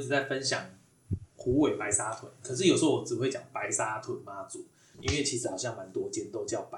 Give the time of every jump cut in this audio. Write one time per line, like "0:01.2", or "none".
0:04.9